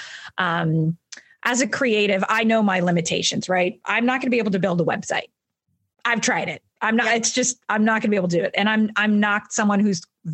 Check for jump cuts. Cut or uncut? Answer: uncut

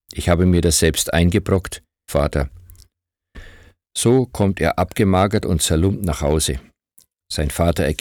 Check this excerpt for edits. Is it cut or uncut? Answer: cut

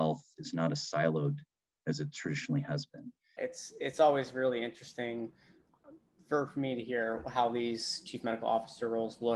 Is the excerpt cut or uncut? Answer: cut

